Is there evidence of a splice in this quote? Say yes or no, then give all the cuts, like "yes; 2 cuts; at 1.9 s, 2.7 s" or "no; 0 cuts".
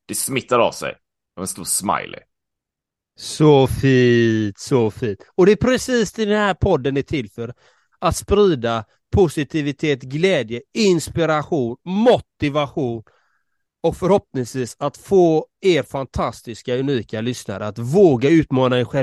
no; 0 cuts